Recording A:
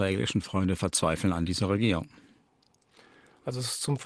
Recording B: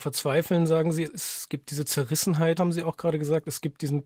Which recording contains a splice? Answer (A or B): B